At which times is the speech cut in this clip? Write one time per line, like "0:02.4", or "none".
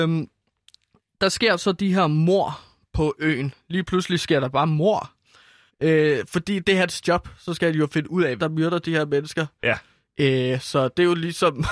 0:05.7
0:08.4